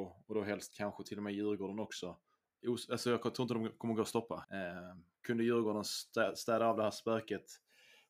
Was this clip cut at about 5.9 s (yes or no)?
no